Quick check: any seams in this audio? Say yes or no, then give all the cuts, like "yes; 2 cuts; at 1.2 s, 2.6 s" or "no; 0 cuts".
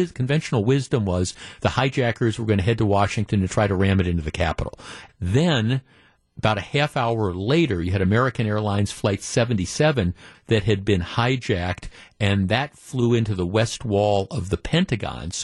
yes; 2 cuts; at 5.1 s, 10.3 s